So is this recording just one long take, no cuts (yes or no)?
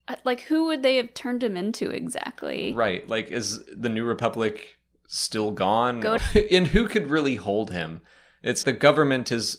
no